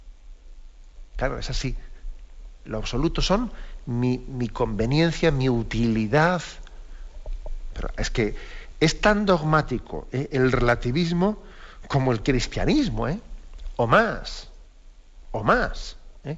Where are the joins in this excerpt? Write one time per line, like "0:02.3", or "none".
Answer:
none